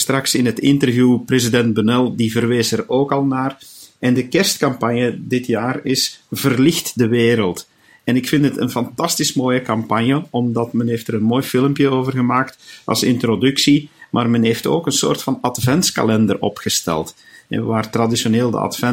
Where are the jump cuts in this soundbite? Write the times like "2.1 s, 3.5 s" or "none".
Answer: none